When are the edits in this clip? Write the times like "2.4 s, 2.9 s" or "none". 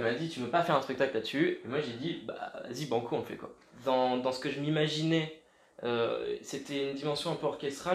none